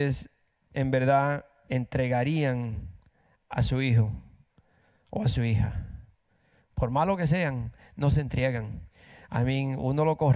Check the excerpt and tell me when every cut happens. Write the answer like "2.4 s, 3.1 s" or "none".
none